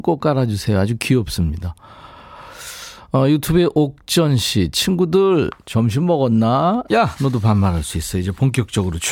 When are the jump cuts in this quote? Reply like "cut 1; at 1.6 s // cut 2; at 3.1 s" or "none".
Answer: cut 1; at 6.9 s

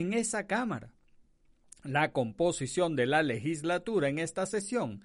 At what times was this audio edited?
none

